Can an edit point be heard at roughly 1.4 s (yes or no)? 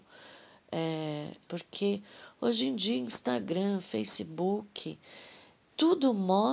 yes